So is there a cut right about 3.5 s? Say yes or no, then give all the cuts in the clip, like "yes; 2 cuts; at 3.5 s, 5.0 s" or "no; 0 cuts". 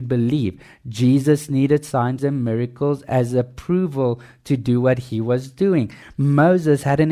no; 2 cuts; at 2.2 s, 6.0 s